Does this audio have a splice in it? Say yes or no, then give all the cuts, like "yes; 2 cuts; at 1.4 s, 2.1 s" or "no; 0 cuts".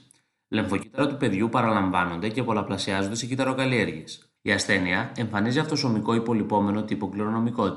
yes; 1 cut; at 4.4 s